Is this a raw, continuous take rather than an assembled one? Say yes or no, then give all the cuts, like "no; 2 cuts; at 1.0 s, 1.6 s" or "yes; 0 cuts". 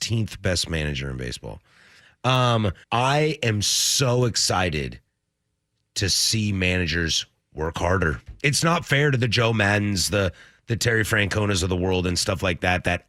no; 2 cuts; at 2.8 s, 8.4 s